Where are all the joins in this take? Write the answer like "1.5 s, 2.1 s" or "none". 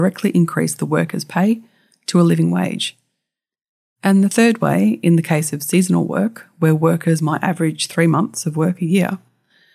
none